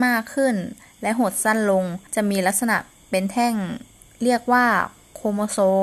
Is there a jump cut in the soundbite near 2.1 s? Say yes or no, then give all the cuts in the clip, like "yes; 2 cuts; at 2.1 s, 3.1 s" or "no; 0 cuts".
yes; 1 cut; at 2.1 s